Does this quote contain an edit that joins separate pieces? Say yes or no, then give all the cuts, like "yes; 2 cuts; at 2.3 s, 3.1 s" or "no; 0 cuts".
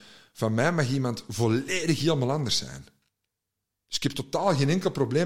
no; 0 cuts